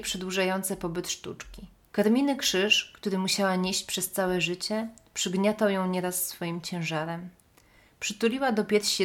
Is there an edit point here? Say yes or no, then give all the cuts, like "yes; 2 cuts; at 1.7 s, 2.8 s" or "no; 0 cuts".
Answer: yes; 1 cut; at 1.9 s